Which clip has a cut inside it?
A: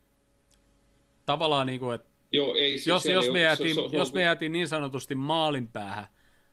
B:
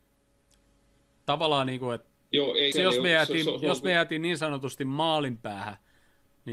B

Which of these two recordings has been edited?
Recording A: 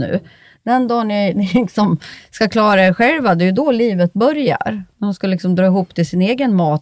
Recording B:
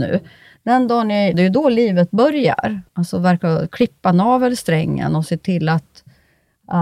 B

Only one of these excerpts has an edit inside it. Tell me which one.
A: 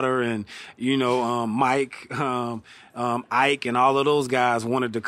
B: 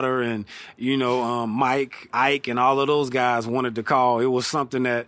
B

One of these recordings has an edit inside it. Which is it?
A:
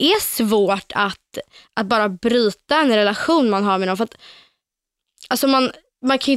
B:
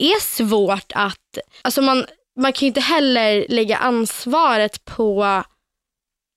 B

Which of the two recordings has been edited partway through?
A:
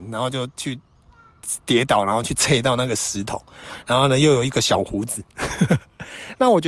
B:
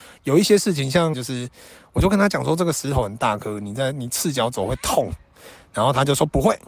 B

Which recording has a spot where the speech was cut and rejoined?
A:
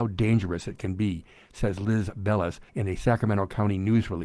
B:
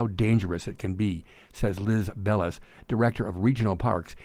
A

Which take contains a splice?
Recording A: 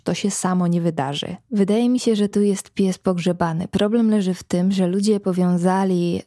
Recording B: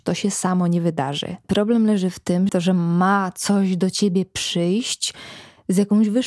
B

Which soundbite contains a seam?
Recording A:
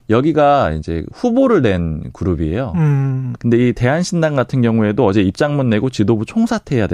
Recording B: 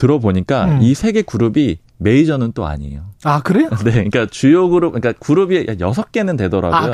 A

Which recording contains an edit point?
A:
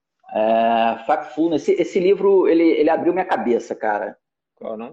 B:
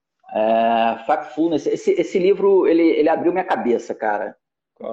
A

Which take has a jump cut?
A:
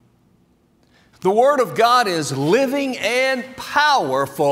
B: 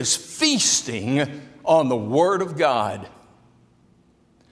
A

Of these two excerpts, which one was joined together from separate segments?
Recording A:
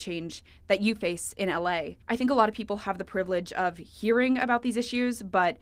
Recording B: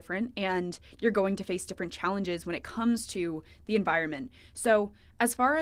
A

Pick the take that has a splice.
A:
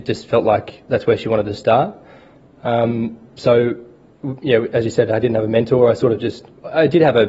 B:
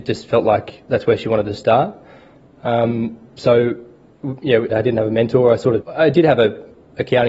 B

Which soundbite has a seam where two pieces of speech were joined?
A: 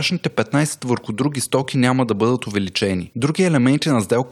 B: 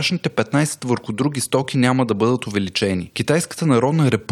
B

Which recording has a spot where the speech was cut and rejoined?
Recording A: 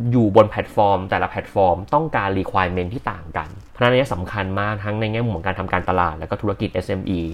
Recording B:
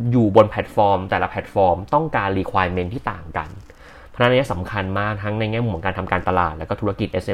A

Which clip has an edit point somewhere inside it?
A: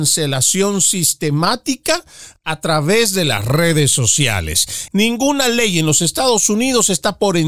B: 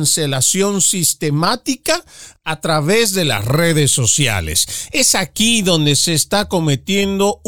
A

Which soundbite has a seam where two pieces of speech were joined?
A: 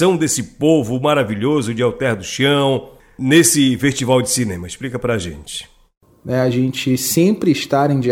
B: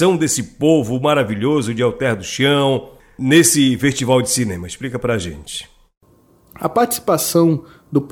A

